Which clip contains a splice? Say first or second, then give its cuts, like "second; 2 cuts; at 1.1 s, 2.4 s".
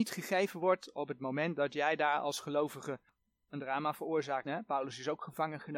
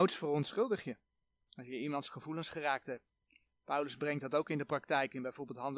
first; 1 cut; at 4.4 s